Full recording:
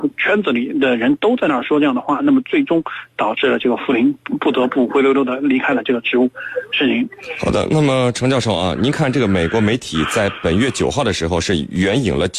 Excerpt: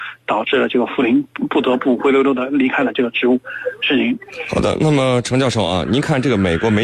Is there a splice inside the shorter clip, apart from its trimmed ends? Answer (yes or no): no